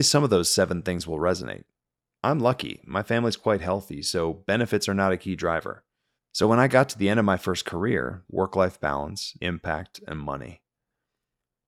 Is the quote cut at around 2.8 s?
no; 3 cuts; at 6.2 s, 8.2 s, 9.4 s

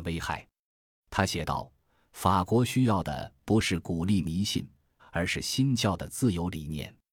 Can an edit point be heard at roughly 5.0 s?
yes; 1 cut; at 5.0 s

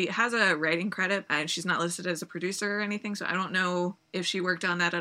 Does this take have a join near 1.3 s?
yes; 1 cut; at 1.3 s

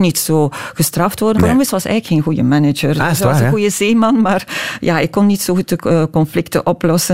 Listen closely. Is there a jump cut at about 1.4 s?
yes; 1 cut; at 1.4 s

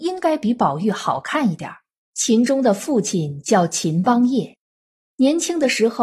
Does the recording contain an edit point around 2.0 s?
yes; 1 cut; at 2.0 s

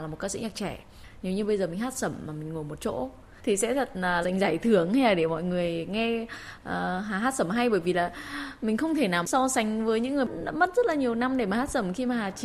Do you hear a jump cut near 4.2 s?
yes; 1 cut; at 4.2 s

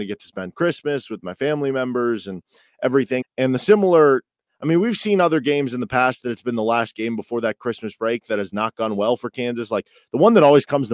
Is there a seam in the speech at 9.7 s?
no; 1 cut; at 3.2 s

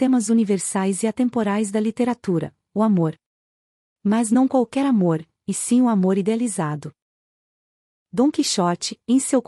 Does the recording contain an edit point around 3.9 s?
no; 0 cuts

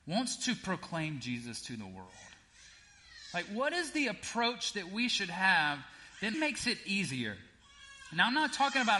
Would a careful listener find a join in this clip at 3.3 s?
no; 1 cut; at 6.3 s

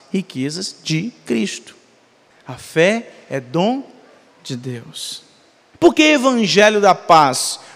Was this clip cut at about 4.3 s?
no; 2 cuts; at 2.3 s, 5.7 s

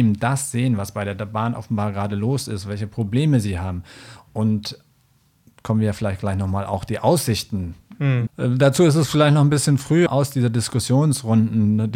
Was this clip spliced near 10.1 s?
yes; 2 cuts; at 8.3 s, 10.1 s

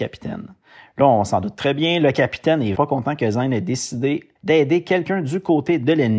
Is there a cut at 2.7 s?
yes; 2 cuts; at 2.7 s, 4.4 s

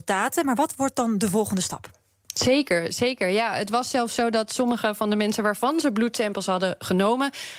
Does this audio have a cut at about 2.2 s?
yes; 1 cut; at 2.2 s

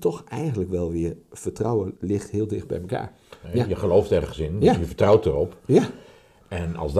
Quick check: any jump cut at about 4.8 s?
no; 2 cuts; at 1.9 s, 3.4 s

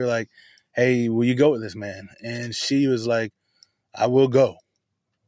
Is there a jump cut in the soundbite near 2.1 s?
no; 0 cuts

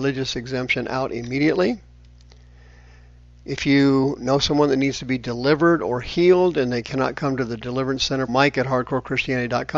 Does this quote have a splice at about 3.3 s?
no; 1 cut; at 8.3 s

